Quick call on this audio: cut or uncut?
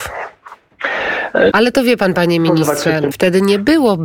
cut